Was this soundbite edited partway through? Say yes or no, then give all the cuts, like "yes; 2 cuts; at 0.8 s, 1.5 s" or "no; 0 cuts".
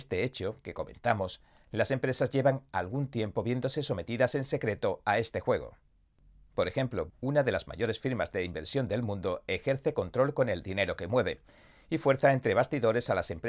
yes; 1 cut; at 7.1 s